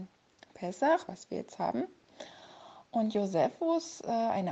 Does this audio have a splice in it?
yes; 1 cut; at 1.1 s

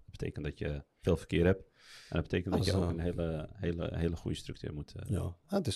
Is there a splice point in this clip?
no; 0 cuts

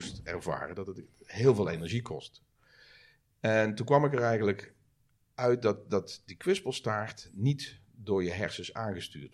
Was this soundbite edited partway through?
no; 0 cuts

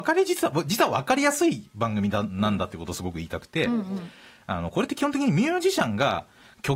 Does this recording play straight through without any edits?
yes; 0 cuts

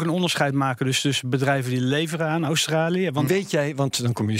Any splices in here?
yes; 1 cut; at 3.3 s

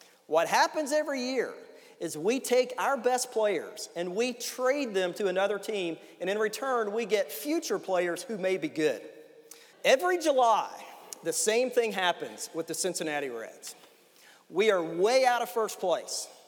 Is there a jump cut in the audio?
yes; 1 cut; at 9.7 s

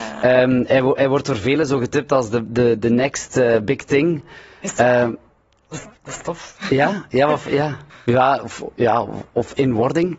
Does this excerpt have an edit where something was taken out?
yes; 1 cut; at 7.9 s

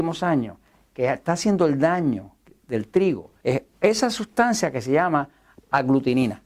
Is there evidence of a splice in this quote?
yes; 1 cut; at 3.4 s

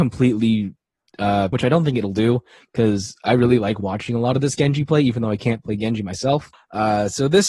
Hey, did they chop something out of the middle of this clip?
yes; 2 cuts; at 1.5 s, 6.5 s

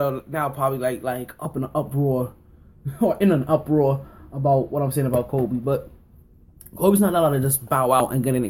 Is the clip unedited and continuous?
yes; 0 cuts

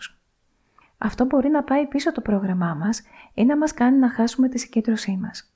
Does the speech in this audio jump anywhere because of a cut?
no; 0 cuts

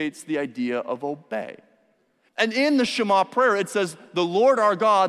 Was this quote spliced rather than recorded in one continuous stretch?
yes; 1 cut; at 2.3 s

